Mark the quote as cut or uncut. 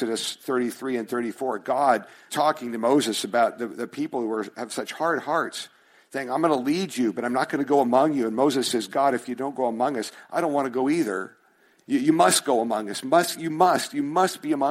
cut